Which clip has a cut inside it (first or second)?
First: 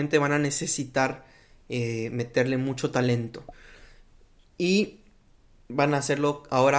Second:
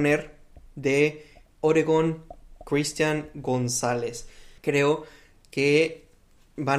second